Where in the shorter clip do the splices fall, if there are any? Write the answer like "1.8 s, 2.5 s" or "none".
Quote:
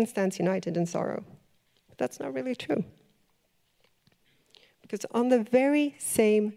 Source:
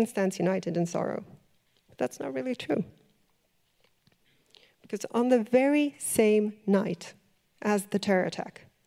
none